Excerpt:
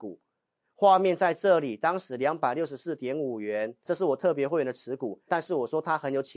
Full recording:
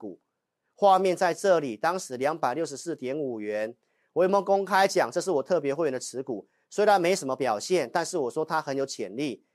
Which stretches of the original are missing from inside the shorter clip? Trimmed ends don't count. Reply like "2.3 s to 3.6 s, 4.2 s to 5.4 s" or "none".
3.9 s to 5.1 s, 6.5 s to 7.9 s